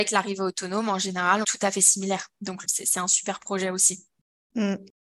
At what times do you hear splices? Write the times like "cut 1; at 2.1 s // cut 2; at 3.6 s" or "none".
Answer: cut 1; at 1.4 s // cut 2; at 2.6 s

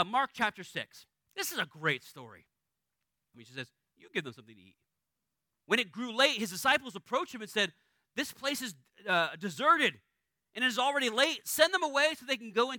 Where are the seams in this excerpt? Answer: cut 1; at 3.3 s // cut 2; at 5.6 s

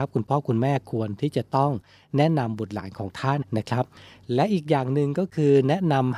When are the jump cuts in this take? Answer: cut 1; at 3.4 s

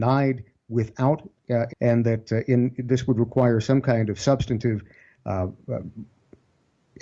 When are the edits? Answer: cut 1; at 1.7 s

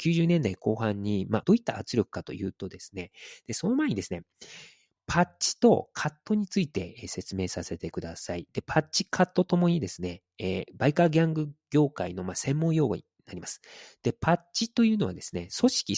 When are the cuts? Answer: cut 1; at 1.4 s

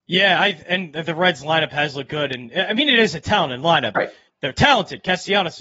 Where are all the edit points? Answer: cut 1; at 3.9 s

